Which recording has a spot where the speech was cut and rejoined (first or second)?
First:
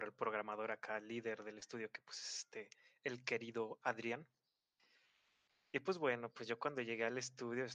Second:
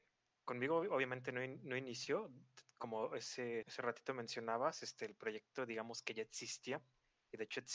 second